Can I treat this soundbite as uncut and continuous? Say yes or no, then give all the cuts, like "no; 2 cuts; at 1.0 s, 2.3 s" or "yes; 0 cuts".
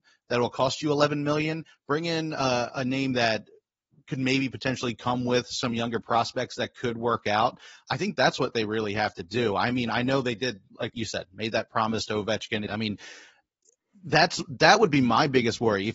no; 1 cut; at 12.7 s